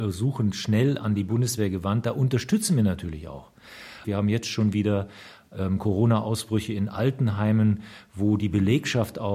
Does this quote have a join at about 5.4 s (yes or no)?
no